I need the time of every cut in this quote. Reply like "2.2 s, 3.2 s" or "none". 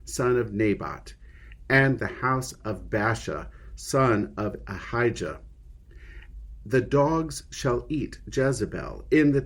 2.0 s